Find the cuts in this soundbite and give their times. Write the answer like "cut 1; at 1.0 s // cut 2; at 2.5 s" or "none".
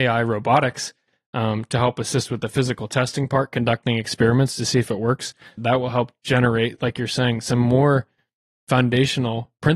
cut 1; at 5.6 s